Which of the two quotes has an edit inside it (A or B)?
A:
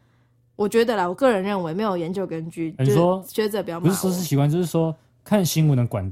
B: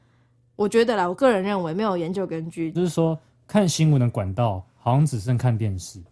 B